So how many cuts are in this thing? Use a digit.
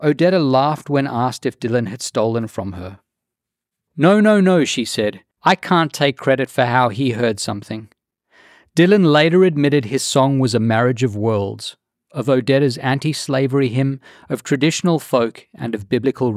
1